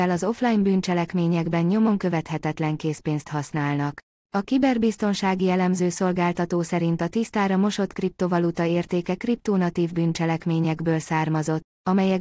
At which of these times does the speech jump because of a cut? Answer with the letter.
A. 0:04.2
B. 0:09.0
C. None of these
A